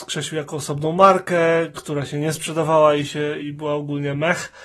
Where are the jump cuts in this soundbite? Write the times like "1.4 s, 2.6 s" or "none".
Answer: 3.4 s